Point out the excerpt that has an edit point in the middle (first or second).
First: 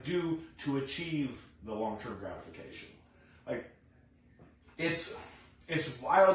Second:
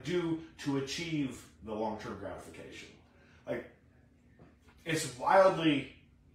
second